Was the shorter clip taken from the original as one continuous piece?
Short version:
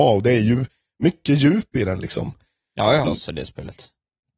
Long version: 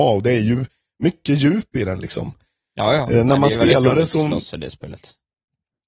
no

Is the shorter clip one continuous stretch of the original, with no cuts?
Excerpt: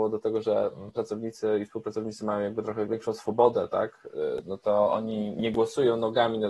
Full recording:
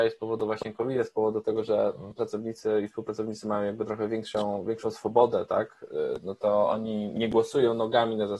no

